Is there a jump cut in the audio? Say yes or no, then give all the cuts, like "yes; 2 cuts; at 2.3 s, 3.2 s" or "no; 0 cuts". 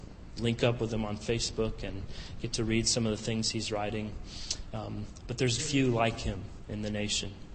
yes; 1 cut; at 5.6 s